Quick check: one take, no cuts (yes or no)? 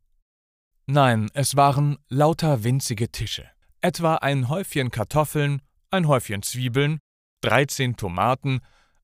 no